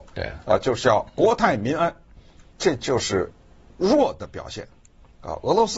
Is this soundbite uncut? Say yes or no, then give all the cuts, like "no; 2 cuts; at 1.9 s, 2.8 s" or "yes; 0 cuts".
no; 1 cut; at 2.5 s